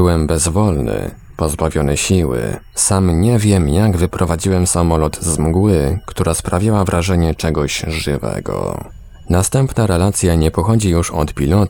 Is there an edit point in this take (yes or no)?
no